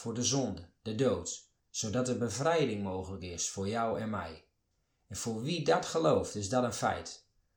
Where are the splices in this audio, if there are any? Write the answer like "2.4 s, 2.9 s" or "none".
1.6 s